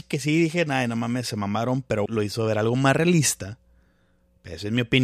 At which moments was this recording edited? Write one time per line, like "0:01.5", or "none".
0:02.1